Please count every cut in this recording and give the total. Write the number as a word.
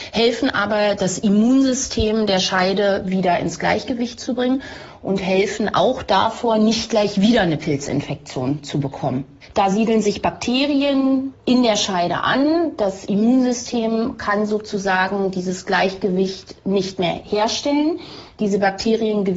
one